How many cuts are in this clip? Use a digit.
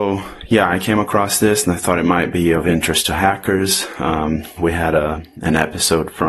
1